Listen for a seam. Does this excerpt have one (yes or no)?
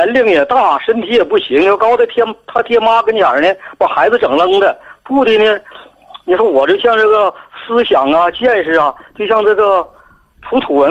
no